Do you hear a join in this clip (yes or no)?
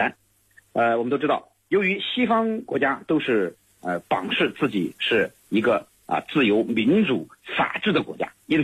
no